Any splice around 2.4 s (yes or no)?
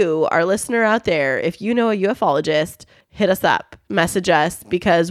no